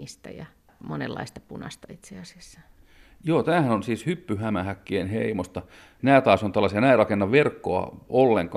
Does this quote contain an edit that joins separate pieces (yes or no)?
no